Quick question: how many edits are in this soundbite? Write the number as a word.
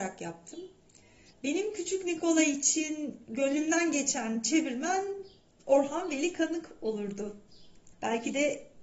two